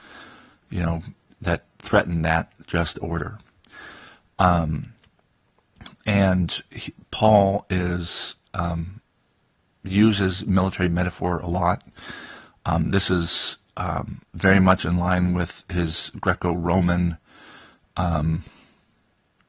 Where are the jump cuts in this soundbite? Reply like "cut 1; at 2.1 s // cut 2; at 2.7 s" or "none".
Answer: cut 1; at 1.3 s